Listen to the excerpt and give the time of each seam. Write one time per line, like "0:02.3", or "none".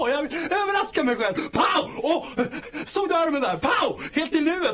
none